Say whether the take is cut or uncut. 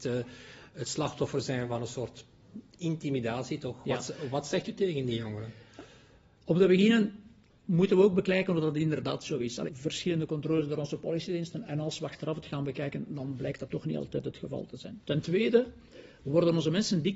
cut